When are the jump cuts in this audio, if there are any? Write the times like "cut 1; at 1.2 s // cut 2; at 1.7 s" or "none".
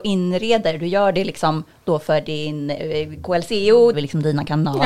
cut 1; at 3.9 s